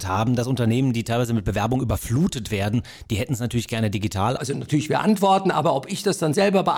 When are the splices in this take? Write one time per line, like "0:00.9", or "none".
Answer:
0:04.4